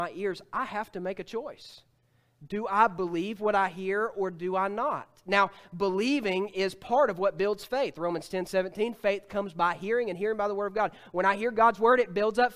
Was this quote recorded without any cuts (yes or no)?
yes